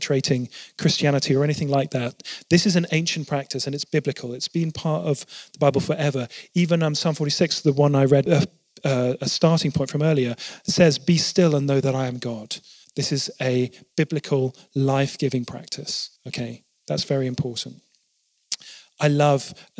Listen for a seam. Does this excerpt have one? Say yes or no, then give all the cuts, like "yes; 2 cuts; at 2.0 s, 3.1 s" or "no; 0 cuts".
yes; 3 cuts; at 8.3 s, 12.8 s, 16.2 s